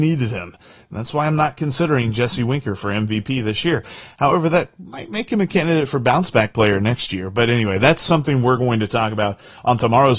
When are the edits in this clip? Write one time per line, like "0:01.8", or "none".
none